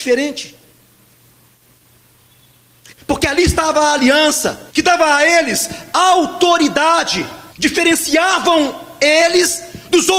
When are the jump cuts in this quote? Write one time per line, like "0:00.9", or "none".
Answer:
0:02.9
0:04.7
0:07.5

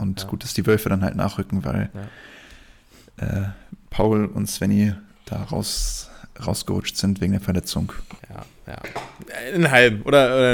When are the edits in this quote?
0:08.2

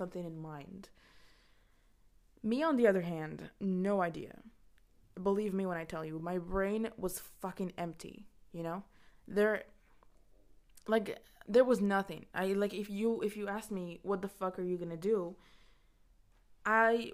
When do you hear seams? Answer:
none

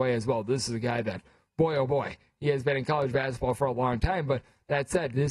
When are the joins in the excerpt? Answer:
none

